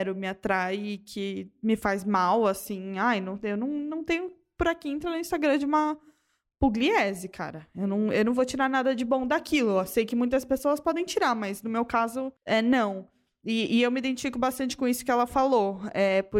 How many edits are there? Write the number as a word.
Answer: one